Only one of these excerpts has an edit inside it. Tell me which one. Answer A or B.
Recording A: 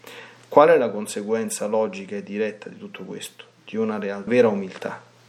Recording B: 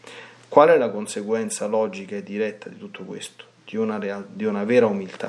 A